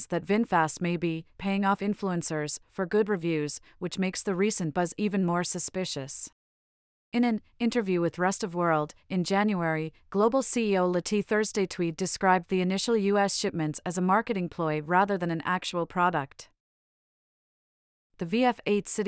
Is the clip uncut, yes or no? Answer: yes